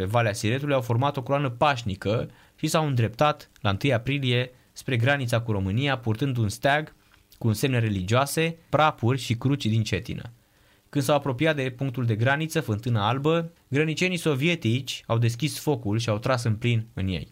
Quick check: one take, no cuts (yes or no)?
no